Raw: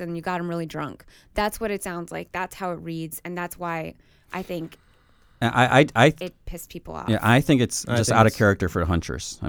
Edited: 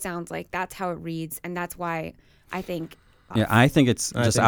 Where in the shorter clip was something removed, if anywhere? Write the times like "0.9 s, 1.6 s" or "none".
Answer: 3.3 s